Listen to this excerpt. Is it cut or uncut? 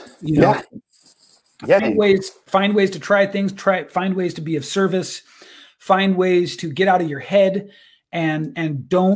cut